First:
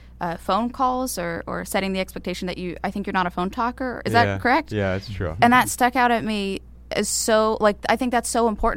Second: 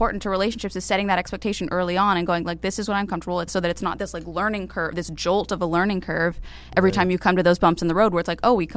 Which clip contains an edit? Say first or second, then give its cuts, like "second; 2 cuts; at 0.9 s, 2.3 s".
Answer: second; 1 cut; at 3.5 s